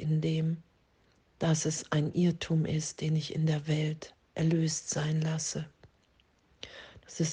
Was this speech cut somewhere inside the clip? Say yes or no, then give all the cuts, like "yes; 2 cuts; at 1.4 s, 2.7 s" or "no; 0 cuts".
no; 0 cuts